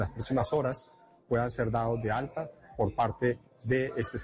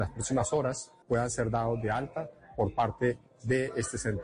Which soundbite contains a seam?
second; 1 cut; at 1.0 s

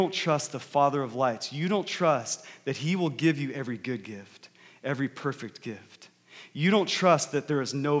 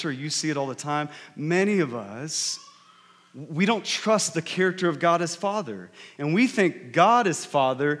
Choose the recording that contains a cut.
second; 1 cut; at 6.1 s

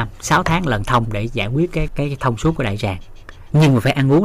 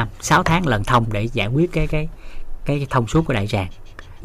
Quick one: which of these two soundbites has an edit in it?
first; 1 cut; at 1.9 s

